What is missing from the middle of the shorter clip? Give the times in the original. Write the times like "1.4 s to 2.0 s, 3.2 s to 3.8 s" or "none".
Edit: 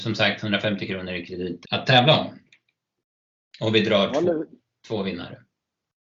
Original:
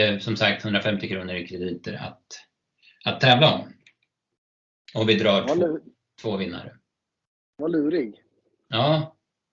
1.9 s to 3.0 s